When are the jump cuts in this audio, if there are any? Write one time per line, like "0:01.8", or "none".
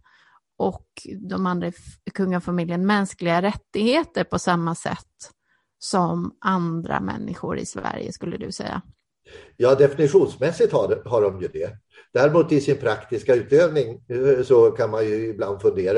none